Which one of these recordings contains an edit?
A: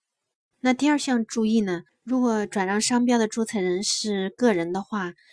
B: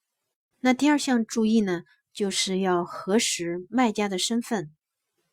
A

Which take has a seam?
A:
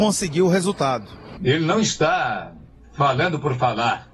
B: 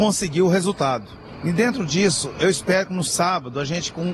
A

